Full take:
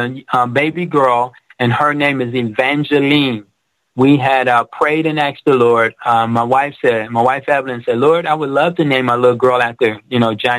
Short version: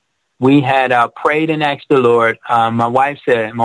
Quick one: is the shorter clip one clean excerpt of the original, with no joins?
yes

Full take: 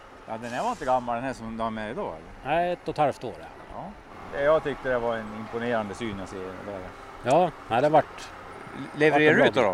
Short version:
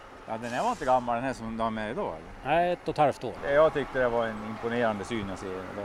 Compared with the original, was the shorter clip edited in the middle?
yes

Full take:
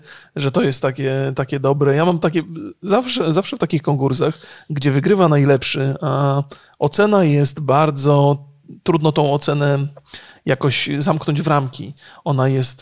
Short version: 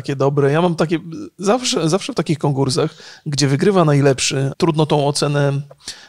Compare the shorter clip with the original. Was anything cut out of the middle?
yes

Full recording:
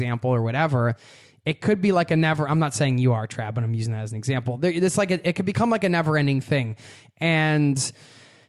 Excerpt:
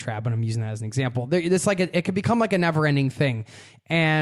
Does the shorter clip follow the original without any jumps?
yes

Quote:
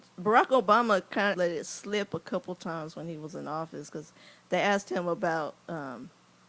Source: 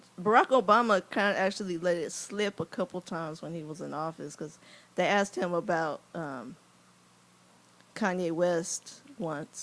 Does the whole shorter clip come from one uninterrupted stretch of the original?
no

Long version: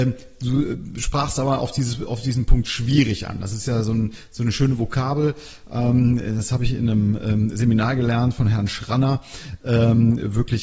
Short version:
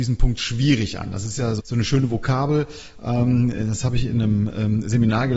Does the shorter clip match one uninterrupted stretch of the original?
no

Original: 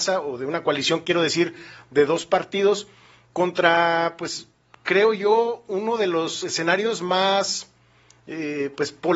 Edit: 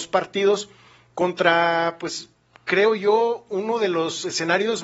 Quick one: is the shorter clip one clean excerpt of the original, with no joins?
yes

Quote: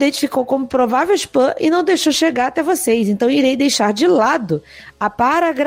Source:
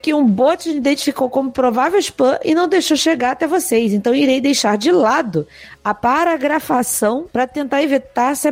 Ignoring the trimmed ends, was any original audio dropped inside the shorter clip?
no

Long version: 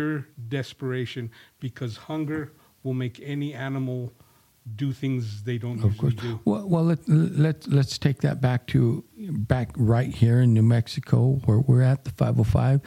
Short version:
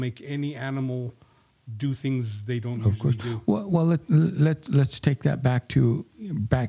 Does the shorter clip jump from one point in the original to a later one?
no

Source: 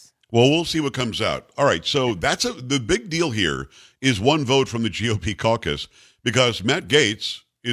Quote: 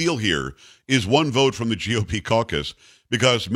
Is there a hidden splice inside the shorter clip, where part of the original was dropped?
no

